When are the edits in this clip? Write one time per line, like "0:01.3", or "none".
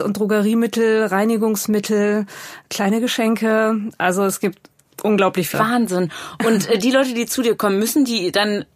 0:05.5